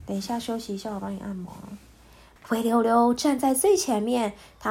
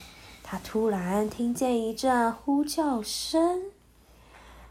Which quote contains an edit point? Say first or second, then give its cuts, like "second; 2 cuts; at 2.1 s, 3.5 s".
first; 1 cut; at 2.4 s